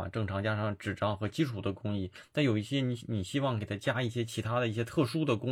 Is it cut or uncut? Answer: uncut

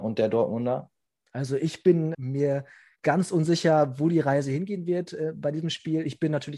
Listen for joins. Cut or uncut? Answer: cut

